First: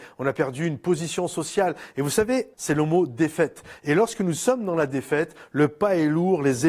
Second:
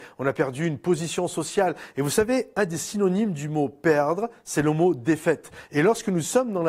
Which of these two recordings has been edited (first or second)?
first